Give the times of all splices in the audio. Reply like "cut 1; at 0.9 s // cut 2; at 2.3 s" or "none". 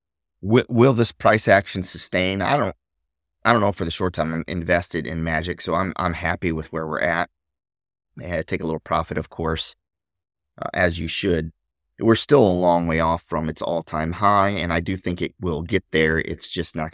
cut 1; at 4.5 s